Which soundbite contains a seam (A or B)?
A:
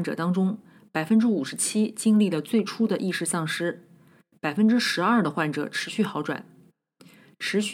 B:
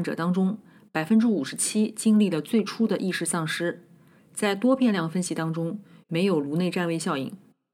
B